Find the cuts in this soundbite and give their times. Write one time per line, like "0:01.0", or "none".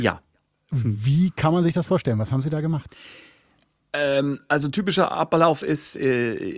none